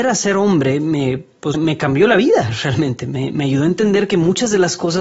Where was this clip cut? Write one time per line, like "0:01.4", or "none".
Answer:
0:01.5